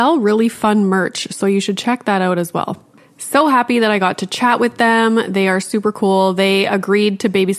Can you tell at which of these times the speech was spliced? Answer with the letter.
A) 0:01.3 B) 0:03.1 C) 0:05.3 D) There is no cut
D